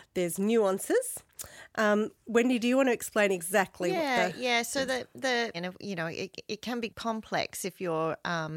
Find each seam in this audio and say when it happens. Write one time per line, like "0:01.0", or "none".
0:05.5
0:06.9